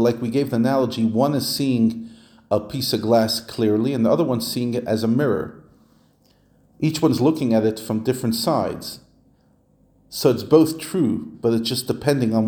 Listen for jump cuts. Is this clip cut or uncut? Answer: uncut